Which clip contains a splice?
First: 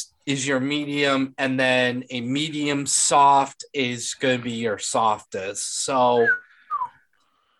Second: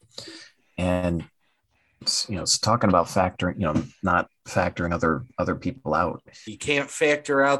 second; 1 cut; at 6.5 s

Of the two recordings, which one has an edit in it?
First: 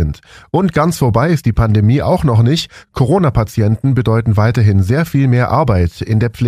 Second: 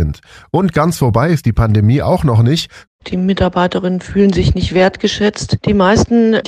second; 2 cuts; at 2.9 s, 5.6 s

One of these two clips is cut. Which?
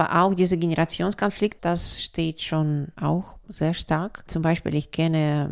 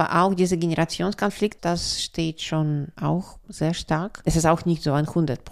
second; 1 cut; at 4.2 s

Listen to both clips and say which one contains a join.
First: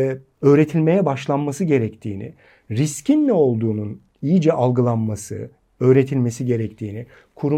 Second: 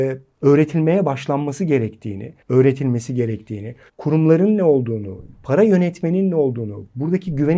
second; 2 cuts; at 2.4 s, 3.9 s

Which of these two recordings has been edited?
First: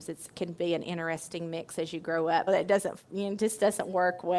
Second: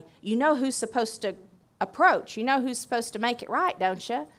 first; 1 cut; at 2.5 s

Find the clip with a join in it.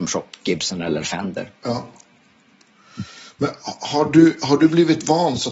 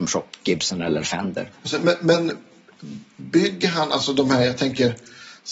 second; 1 cut; at 1.5 s

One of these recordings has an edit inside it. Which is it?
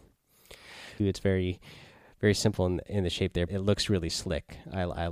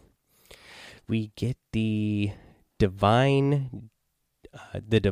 first; 2 cuts; at 1.0 s, 3.5 s

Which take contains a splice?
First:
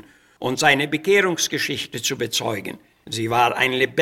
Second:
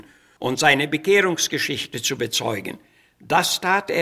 first; 1 cut; at 2.9 s

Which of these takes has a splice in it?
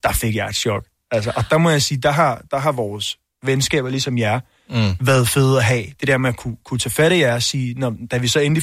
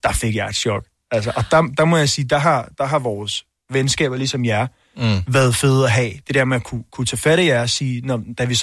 first; 1 cut; at 1.5 s

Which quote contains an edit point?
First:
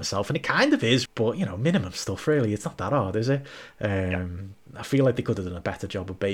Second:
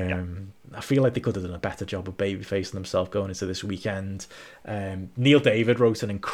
first; 1 cut; at 1.1 s

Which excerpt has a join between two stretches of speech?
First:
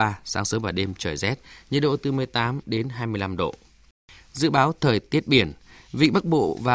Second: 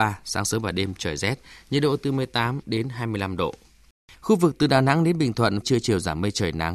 second; 2 cuts; at 4.1 s, 5.6 s

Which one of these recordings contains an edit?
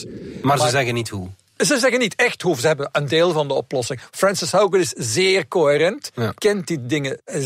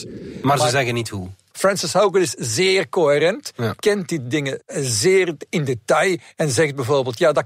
second; 1 cut; at 1.5 s

